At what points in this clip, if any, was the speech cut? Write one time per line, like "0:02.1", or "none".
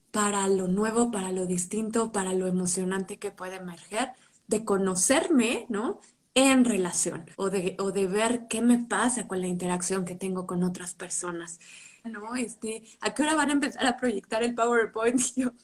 0:07.3
0:12.0